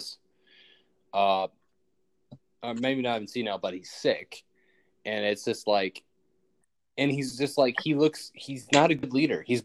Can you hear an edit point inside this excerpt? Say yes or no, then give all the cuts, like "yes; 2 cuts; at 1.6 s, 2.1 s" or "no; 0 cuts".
no; 0 cuts